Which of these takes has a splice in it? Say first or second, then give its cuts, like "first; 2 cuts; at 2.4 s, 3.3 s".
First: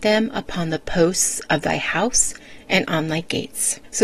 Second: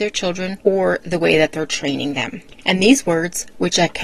second; 1 cut; at 2.5 s